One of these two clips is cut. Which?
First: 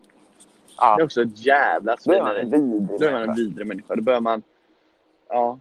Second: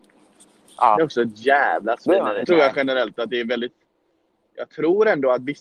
second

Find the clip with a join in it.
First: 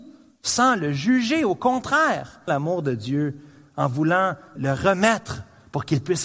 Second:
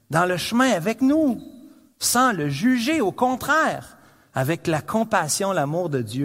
first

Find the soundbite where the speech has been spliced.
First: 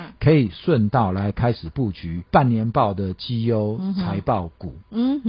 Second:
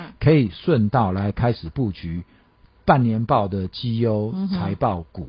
first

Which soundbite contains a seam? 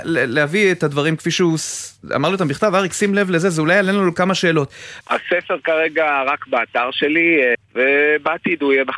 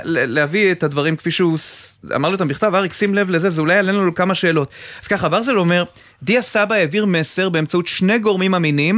first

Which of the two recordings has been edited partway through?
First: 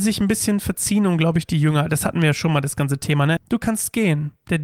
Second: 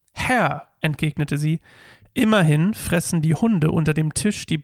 first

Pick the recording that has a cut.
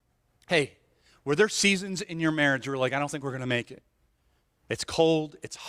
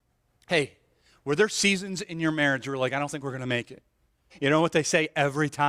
second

